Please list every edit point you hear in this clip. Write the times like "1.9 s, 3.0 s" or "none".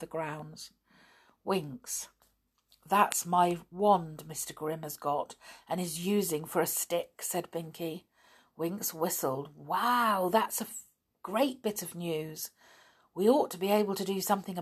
none